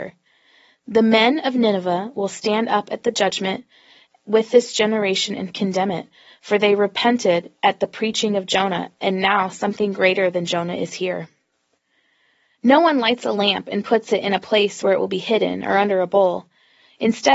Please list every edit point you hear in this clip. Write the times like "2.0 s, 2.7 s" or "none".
none